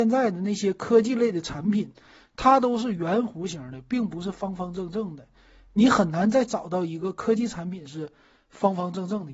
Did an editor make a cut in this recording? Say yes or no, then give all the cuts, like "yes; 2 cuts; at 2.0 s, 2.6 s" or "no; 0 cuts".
no; 0 cuts